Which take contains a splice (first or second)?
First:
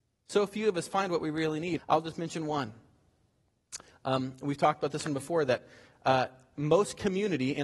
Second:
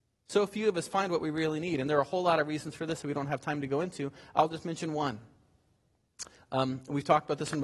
first